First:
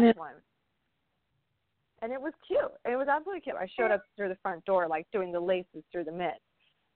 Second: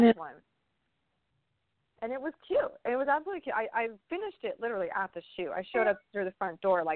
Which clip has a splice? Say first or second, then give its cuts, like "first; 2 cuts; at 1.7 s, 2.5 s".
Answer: first; 1 cut; at 3.5 s